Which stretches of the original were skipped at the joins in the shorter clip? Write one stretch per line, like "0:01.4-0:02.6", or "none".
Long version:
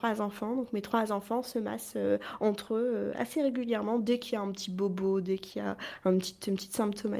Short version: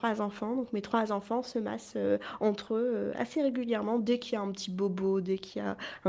none